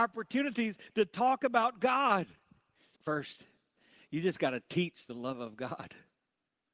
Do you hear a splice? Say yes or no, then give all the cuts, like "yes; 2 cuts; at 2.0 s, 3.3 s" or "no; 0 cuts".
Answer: yes; 1 cut; at 3.0 s